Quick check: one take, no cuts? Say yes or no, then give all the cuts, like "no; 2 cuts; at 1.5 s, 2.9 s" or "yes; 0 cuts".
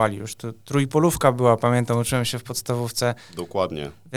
yes; 0 cuts